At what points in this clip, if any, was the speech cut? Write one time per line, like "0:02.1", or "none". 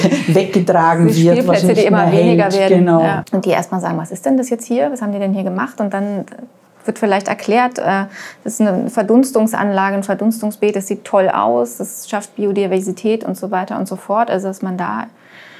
0:03.2